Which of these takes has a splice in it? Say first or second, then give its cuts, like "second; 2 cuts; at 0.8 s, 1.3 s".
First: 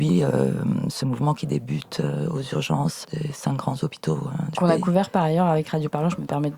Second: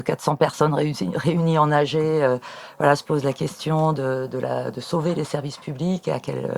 first; 2 cuts; at 3.0 s, 4.5 s